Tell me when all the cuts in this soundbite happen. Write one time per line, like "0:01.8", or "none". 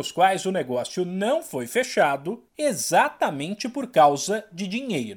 0:02.5